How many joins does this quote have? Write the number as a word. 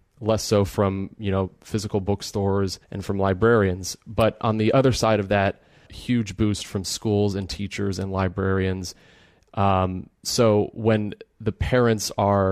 two